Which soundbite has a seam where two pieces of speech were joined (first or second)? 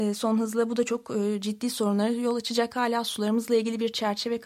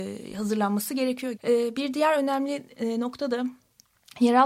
second